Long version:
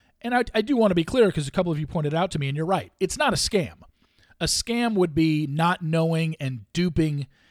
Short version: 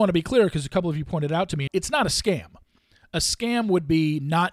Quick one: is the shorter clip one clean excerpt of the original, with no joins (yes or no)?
no